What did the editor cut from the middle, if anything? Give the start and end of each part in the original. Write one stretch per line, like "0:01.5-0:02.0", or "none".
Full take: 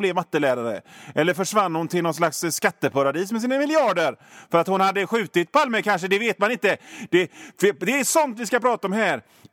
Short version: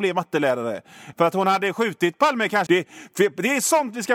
0:01.1-0:04.5
0:06.0-0:07.1